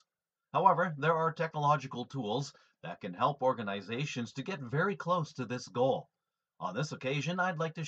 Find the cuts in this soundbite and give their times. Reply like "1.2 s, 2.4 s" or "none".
none